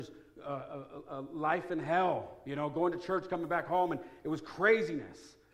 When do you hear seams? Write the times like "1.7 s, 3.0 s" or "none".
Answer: none